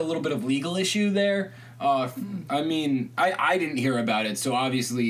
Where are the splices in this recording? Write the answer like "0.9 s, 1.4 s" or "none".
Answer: none